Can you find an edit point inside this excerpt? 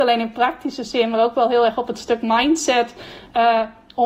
no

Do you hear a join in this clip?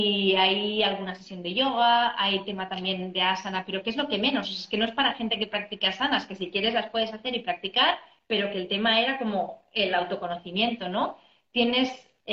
no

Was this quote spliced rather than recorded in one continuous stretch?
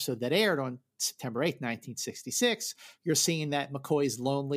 no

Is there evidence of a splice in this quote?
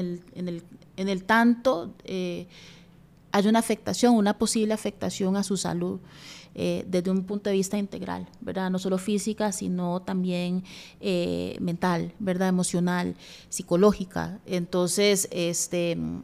no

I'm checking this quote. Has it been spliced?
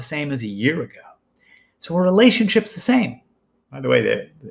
yes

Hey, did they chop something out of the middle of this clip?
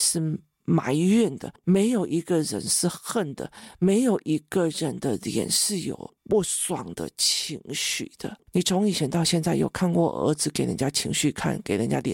yes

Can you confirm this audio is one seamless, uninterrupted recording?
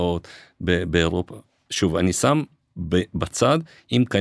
yes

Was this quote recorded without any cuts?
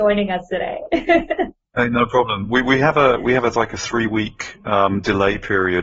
yes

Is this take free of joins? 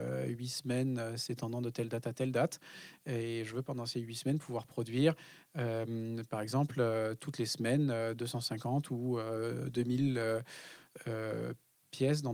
yes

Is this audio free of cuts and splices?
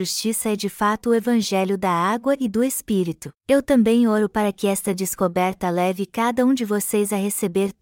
no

